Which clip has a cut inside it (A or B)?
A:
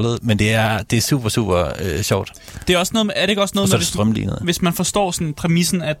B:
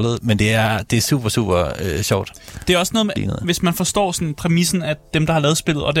B